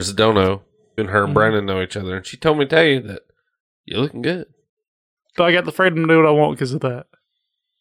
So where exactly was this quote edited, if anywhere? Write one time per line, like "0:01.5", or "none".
0:01.0
0:05.3